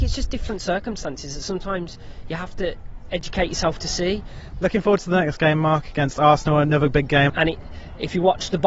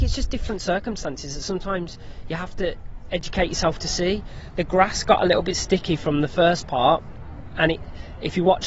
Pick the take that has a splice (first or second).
first